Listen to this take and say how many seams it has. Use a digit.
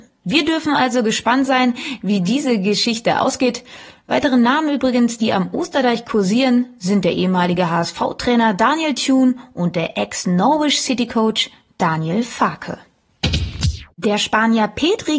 1